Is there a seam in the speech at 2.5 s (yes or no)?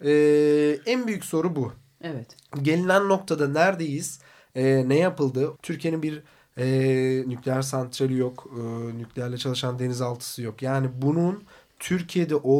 no